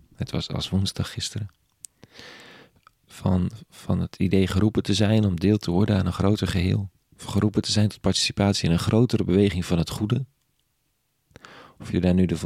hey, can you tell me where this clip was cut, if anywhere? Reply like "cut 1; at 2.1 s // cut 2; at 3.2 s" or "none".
none